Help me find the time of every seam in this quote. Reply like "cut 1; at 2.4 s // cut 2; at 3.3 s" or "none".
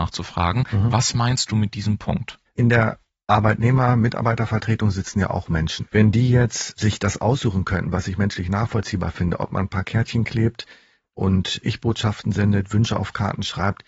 cut 1; at 2.5 s // cut 2; at 5.8 s